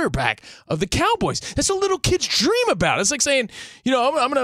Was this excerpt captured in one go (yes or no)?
yes